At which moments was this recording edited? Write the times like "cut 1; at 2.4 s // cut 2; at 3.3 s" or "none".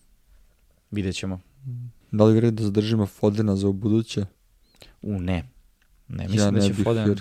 cut 1; at 2.0 s